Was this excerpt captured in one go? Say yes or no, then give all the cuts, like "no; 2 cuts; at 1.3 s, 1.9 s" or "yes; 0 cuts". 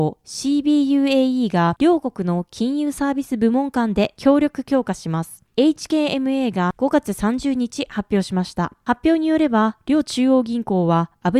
yes; 0 cuts